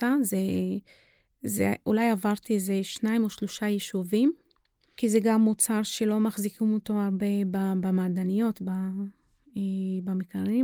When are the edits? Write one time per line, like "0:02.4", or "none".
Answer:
none